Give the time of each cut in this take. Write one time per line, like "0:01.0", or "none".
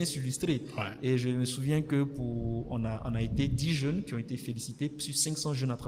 none